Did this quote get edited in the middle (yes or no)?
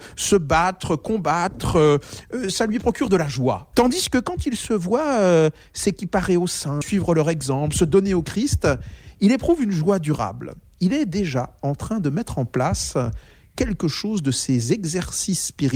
yes